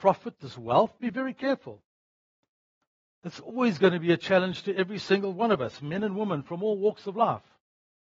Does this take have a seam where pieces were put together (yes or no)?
no